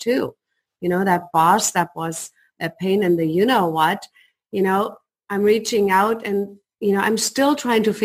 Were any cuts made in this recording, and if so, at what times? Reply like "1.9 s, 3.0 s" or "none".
none